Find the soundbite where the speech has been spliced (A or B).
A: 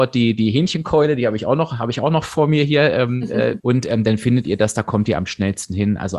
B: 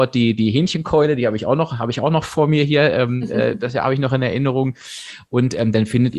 A